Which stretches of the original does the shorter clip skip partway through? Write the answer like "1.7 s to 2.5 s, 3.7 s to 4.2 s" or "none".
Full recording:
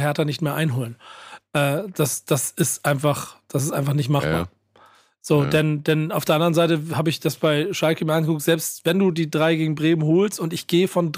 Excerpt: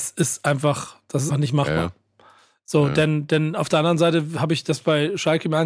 3.7 s to 3.9 s